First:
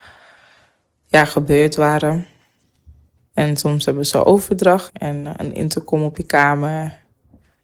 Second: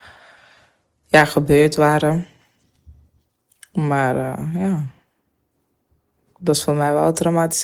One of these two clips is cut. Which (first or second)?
first